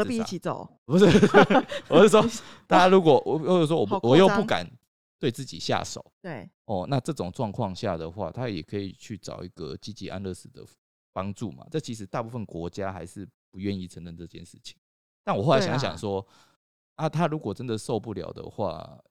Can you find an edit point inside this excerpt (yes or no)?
no